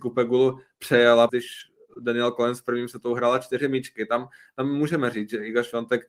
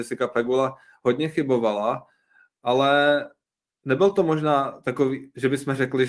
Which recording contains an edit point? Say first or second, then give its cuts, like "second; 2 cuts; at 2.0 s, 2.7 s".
first; 1 cut; at 1.3 s